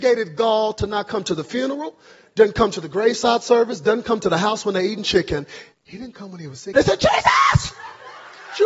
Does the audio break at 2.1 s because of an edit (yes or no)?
no